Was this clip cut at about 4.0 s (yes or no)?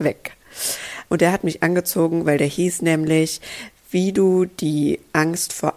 no